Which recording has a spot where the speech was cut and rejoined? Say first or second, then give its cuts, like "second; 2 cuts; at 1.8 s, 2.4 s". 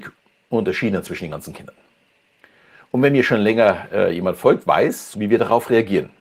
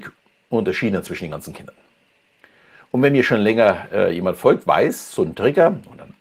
first; 1 cut; at 5.1 s